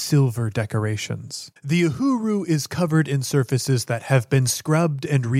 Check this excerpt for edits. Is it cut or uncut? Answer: cut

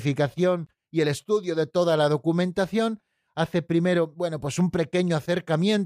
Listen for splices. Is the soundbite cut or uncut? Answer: uncut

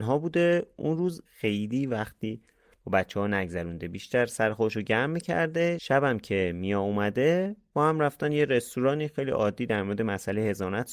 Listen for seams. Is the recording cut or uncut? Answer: cut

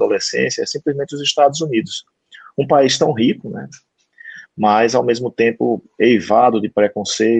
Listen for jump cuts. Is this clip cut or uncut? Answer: uncut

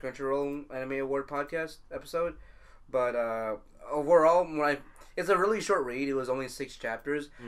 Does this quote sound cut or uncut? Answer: uncut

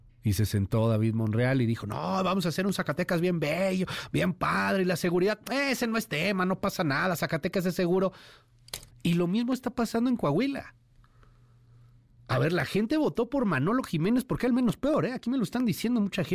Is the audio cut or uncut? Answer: cut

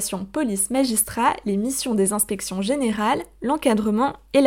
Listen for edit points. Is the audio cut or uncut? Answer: uncut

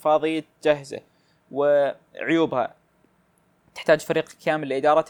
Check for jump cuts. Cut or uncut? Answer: uncut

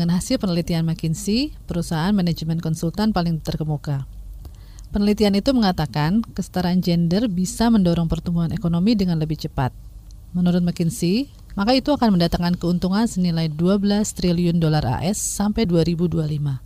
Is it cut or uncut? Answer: cut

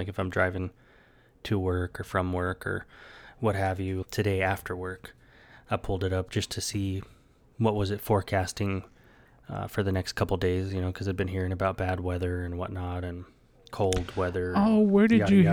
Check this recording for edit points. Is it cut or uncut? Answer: cut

